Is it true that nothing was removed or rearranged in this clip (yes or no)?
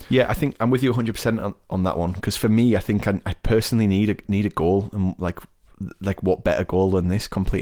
yes